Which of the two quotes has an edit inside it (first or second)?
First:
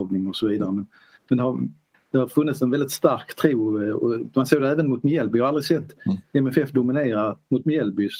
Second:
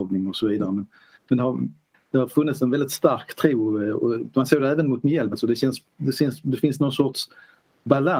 second